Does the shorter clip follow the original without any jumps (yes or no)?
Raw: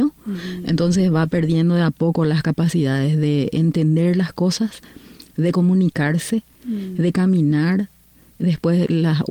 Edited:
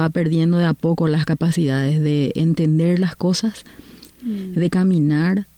no